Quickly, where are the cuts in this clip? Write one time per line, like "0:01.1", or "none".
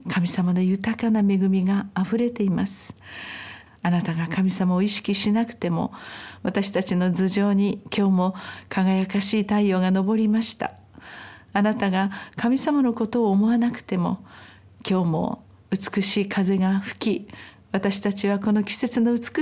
0:03.7